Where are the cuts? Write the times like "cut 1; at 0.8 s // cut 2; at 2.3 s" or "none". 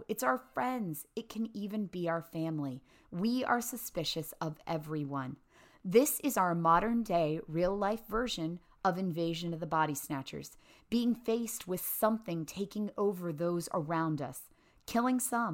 none